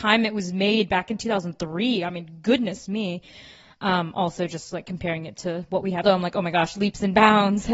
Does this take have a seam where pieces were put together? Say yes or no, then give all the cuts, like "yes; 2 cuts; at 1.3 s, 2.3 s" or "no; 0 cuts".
yes; 1 cut; at 6.0 s